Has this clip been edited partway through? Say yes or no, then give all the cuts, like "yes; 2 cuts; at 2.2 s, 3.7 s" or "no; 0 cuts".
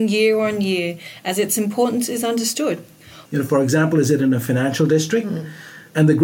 yes; 1 cut; at 3.3 s